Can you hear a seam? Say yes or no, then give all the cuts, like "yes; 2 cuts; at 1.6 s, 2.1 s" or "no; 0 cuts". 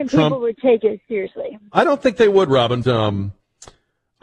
yes; 1 cut; at 2.8 s